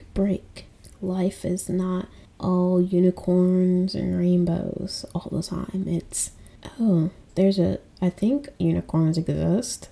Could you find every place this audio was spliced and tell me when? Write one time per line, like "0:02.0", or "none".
0:07.3